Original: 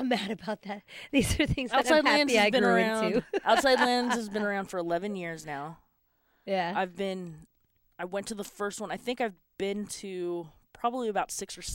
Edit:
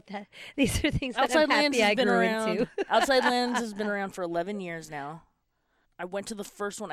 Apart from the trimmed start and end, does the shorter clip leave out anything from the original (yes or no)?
yes